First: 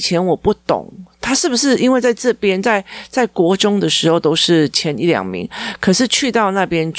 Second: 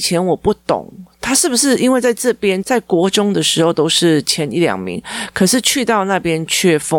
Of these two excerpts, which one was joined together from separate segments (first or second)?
second